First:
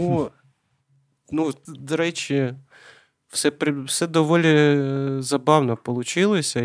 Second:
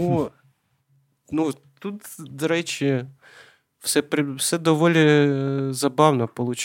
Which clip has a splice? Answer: first; 1 cut; at 1.7 s

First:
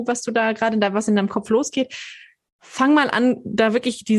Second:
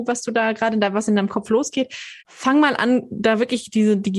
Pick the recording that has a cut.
second; 1 cut; at 2.2 s

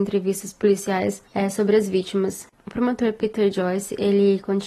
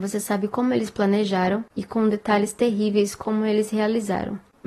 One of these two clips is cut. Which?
first; 1 cut; at 1.3 s

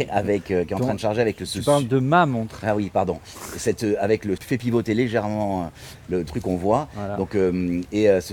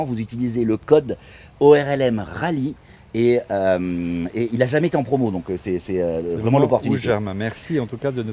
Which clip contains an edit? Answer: first; 1 cut; at 4.4 s

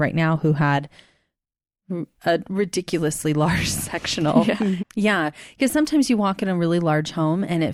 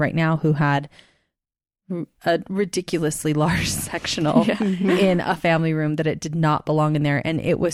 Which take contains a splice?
first; 1 cut; at 4.8 s

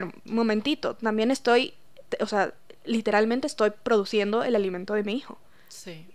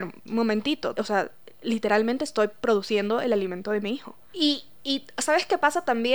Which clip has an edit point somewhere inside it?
second; 2 cuts; at 1.0 s, 4.3 s

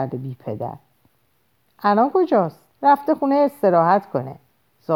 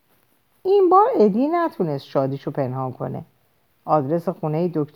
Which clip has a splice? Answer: first; 1 cut; at 2.7 s

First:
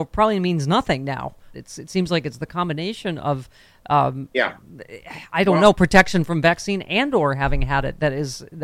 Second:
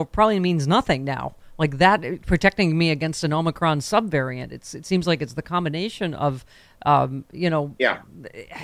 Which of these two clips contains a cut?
first; 2 cuts; at 1.5 s, 4.3 s

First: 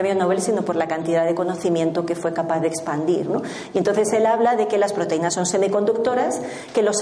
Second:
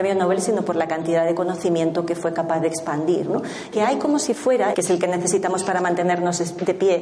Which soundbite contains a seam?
second; 2 cuts; at 3.7 s, 4.7 s

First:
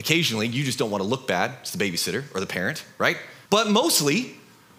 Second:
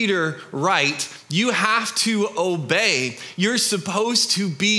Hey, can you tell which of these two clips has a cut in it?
first; 1 cut; at 3.5 s

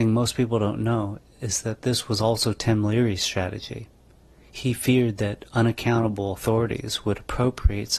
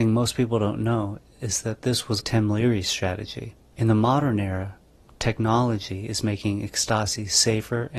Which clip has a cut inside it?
second; 2 cuts; at 2.2 s, 3.7 s

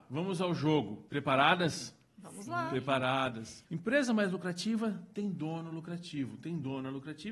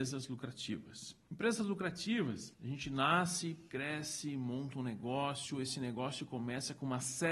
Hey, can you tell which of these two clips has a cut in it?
first; 1 cut; at 3.6 s

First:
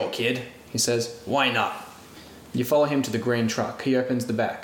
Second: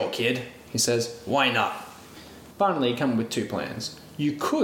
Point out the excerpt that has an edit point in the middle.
second; 1 cut; at 2.5 s

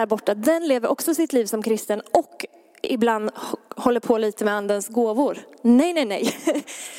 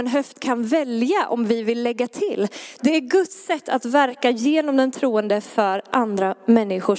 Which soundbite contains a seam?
second; 1 cut; at 2.8 s

